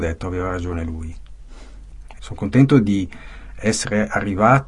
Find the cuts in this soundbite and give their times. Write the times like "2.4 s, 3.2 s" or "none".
2.2 s